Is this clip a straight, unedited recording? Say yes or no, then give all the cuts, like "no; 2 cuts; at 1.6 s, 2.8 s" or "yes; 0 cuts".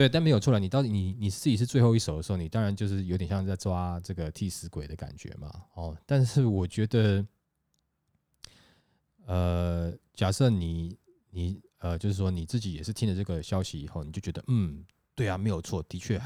yes; 0 cuts